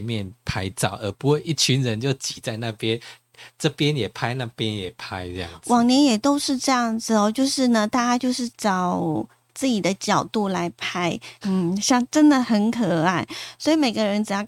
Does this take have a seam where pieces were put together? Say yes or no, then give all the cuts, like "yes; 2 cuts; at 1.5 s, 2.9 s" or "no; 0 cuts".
yes; 3 cuts; at 8.5 s, 11.4 s, 12.4 s